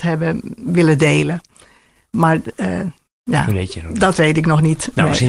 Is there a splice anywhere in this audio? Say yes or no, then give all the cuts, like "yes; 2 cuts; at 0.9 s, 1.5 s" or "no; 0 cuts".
no; 0 cuts